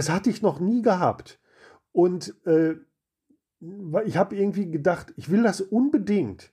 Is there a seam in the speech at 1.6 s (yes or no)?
no